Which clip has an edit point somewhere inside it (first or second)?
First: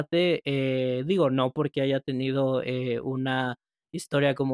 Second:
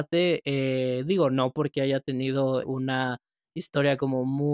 second